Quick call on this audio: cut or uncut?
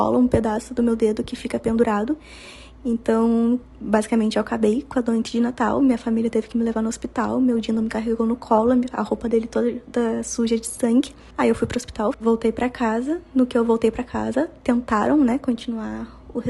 cut